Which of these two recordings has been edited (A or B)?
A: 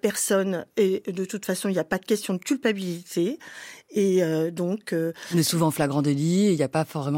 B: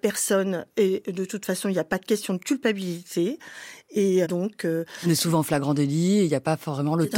B